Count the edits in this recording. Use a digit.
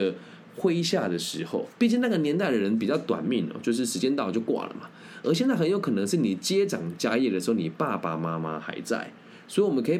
0